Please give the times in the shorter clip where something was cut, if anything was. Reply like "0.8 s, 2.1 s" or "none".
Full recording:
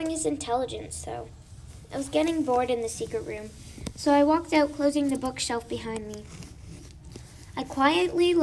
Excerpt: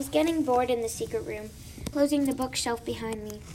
1.9 s